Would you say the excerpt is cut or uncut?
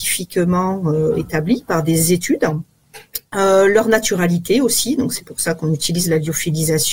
uncut